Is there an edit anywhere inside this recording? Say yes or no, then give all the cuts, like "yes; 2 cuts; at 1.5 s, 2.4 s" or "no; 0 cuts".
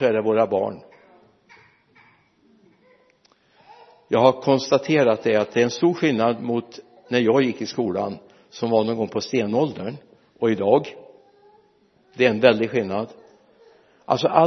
no; 0 cuts